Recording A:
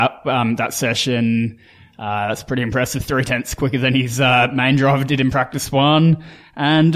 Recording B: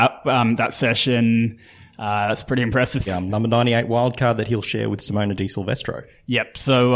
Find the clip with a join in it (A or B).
B